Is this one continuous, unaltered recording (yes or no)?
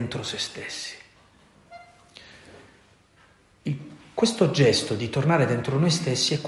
yes